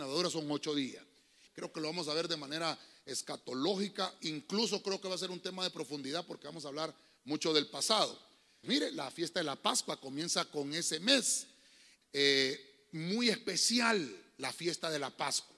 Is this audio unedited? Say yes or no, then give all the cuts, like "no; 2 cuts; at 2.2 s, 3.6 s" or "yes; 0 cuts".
no; 3 cuts; at 1.5 s, 8.6 s, 12.0 s